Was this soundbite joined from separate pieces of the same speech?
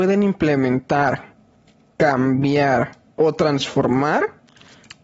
no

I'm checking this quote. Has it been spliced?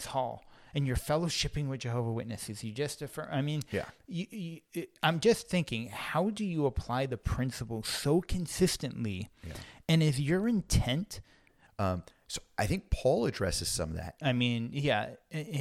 yes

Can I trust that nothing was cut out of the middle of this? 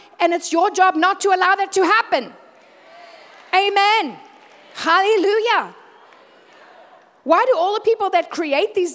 yes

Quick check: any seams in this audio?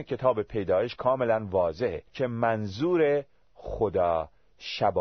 yes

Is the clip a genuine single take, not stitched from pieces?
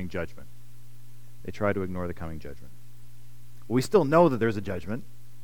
yes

